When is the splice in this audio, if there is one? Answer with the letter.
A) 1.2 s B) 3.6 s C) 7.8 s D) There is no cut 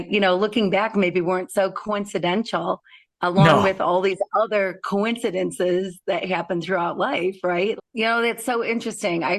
C